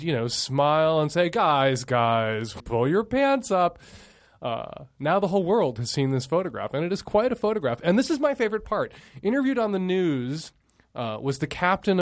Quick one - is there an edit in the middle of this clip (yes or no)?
yes